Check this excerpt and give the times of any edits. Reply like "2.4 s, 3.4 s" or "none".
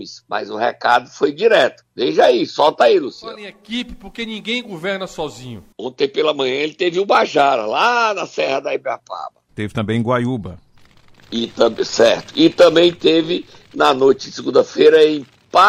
5.7 s